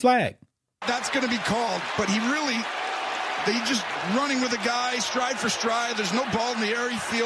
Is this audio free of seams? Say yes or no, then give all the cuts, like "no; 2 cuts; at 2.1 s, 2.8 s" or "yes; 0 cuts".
yes; 0 cuts